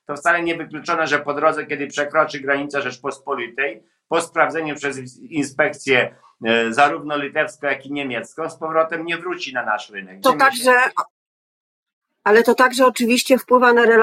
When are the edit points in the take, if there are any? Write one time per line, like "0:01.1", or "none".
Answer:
0:10.2